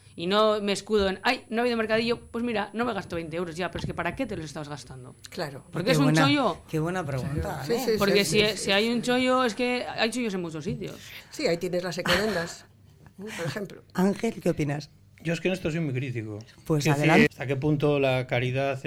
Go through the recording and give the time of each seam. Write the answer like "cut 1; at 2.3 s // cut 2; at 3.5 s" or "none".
cut 1; at 17.3 s